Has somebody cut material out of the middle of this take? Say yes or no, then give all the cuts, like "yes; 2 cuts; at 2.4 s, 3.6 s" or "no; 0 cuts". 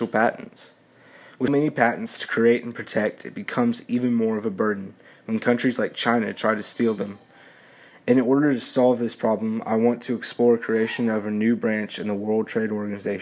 yes; 1 cut; at 1.5 s